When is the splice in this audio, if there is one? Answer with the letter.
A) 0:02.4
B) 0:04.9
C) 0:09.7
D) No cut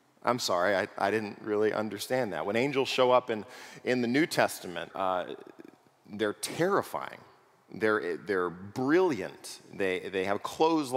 B